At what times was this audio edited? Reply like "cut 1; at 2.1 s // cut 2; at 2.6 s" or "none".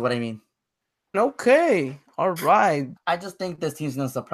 cut 1; at 1.1 s // cut 2; at 3.0 s